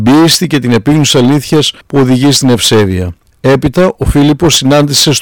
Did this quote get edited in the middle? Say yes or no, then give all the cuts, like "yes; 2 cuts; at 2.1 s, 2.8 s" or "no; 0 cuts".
yes; 1 cut; at 3.3 s